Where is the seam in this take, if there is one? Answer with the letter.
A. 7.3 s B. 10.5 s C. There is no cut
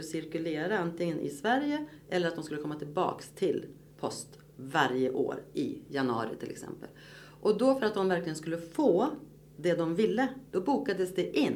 B